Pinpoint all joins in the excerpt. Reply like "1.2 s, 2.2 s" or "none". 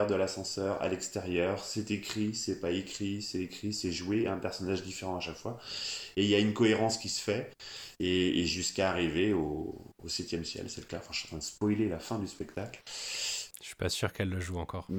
none